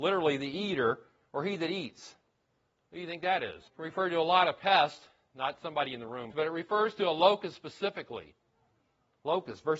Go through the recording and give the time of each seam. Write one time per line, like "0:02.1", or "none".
0:03.7
0:06.3